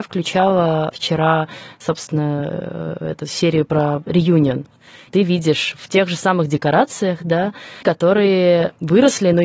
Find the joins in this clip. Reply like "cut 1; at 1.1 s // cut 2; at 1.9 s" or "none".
cut 1; at 5.1 s // cut 2; at 7.8 s